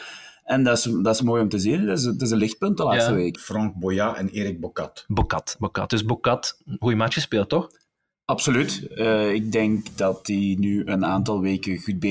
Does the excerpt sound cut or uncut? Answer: cut